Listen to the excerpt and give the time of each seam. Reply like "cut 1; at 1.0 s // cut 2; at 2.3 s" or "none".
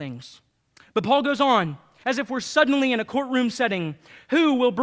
cut 1; at 2.0 s